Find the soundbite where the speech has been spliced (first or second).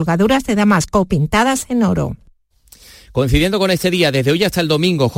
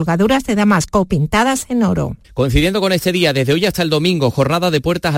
second